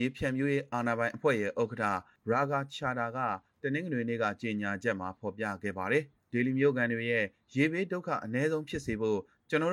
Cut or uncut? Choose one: uncut